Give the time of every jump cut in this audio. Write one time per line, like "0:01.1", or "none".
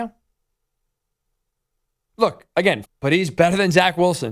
0:02.8